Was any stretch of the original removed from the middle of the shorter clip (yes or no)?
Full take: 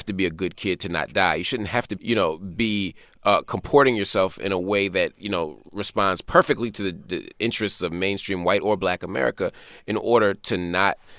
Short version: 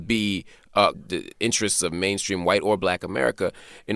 yes